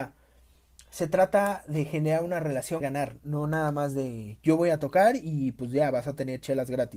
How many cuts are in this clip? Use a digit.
1